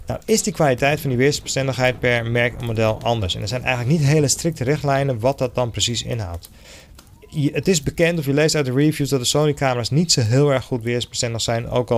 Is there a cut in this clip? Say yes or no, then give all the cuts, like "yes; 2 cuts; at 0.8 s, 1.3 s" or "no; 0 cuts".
no; 0 cuts